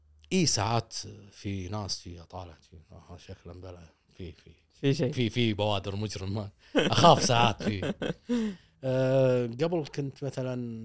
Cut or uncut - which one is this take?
cut